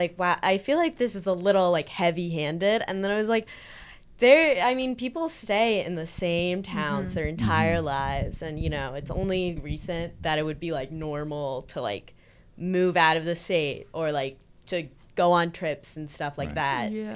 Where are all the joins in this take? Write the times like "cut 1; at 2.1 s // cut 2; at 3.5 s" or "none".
cut 1; at 9.6 s